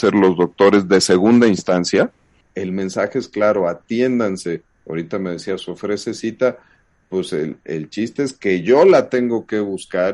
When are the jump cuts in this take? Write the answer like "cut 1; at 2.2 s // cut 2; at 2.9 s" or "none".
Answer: cut 1; at 2.4 s